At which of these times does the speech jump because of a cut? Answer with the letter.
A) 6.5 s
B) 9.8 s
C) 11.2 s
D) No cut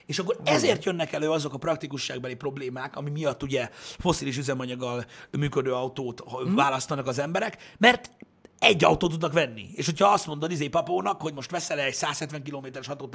D